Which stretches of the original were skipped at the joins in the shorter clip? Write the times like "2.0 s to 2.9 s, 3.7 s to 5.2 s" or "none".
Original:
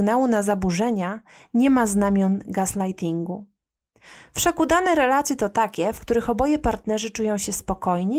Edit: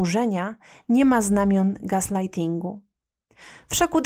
none